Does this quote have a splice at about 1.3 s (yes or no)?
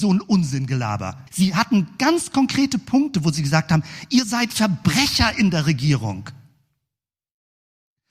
yes